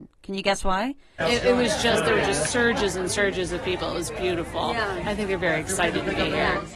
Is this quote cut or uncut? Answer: cut